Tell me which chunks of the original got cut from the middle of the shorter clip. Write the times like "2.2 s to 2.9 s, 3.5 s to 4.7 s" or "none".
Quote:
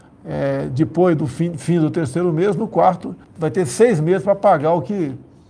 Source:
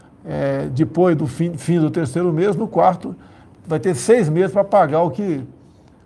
3.2 s to 3.5 s